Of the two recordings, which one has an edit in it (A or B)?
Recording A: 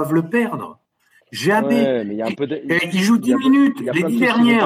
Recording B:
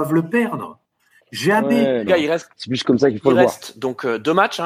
B